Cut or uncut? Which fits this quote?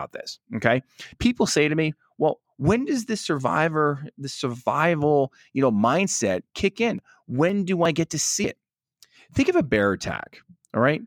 uncut